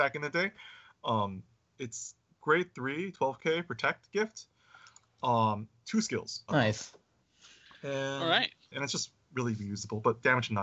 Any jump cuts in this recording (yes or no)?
yes